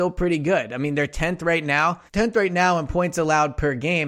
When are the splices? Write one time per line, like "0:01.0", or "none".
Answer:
0:02.1